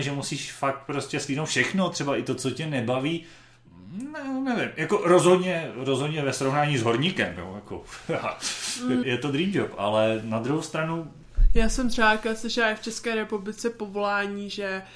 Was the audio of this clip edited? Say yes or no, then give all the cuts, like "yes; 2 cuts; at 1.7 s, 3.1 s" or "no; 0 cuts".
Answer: yes; 1 cut; at 9.0 s